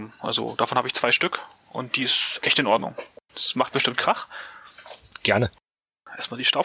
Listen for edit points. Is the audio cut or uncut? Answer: cut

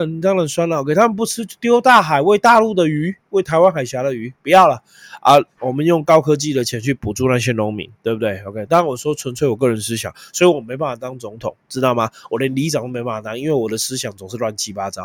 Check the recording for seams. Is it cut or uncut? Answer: uncut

